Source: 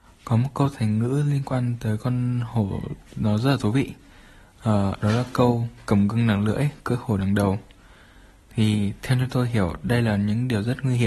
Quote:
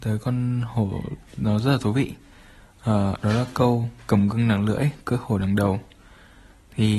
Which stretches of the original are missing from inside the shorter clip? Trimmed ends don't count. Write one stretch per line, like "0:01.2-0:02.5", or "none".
none